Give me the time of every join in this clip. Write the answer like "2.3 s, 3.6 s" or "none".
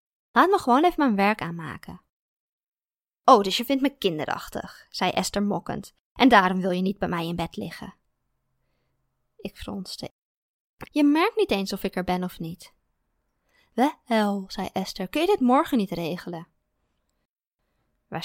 10.9 s